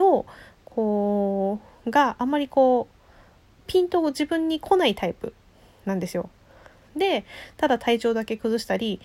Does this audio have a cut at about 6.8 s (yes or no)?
no